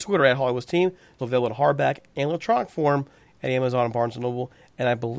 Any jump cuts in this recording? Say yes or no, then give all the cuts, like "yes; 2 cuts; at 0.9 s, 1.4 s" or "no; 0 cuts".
yes; 1 cut; at 1.2 s